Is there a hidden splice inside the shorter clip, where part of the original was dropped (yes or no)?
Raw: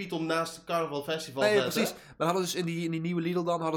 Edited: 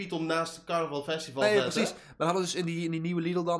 no